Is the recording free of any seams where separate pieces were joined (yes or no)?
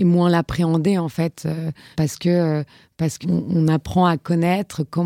no